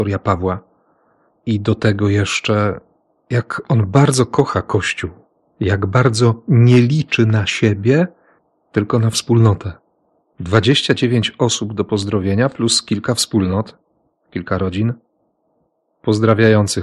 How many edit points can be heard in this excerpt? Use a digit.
1